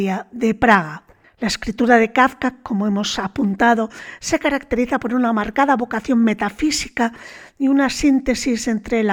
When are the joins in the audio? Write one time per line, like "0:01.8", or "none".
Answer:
none

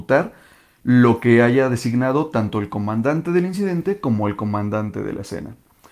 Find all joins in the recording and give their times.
none

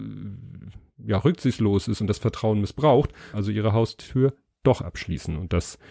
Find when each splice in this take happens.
0:03.3

